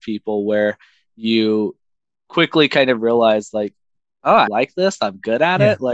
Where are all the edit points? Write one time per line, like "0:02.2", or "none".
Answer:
0:04.5